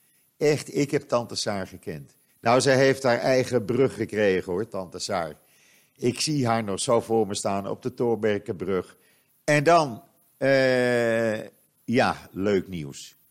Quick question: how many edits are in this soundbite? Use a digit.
2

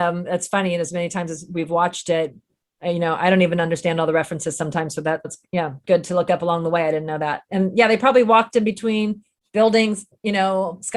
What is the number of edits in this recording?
1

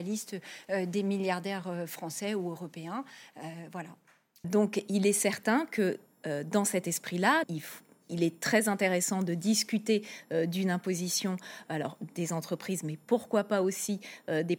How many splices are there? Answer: 2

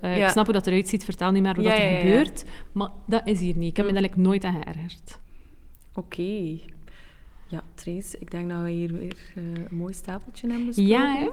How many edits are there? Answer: 0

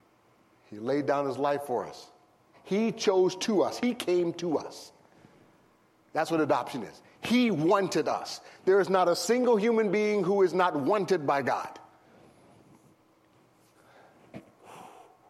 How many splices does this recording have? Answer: 1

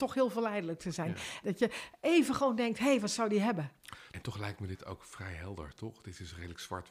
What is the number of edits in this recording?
2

